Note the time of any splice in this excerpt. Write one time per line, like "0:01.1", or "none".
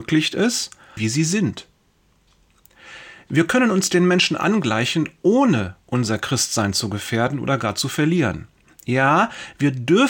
0:01.0
0:05.8